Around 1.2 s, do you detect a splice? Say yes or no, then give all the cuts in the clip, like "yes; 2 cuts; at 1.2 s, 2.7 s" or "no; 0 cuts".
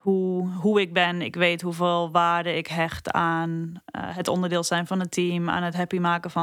no; 0 cuts